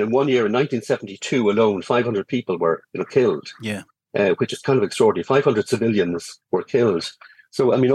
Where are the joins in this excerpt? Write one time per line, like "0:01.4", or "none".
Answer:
none